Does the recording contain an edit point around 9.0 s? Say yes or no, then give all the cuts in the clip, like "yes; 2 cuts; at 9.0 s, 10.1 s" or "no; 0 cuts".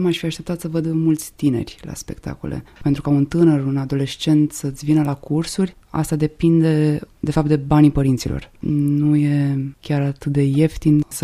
no; 1 cut; at 2.8 s